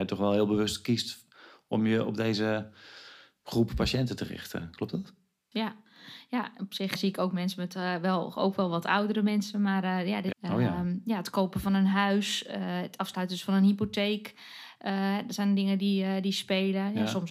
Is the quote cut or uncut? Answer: cut